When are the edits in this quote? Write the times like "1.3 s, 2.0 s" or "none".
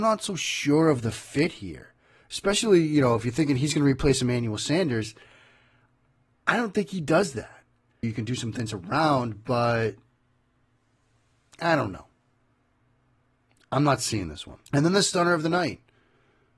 8.0 s, 14.7 s